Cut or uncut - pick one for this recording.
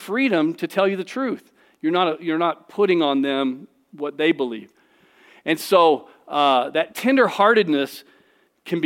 uncut